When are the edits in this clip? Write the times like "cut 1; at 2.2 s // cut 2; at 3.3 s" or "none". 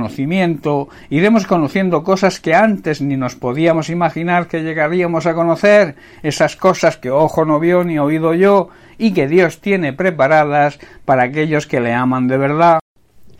none